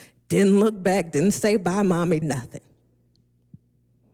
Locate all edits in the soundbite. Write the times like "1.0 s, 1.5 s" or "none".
2.2 s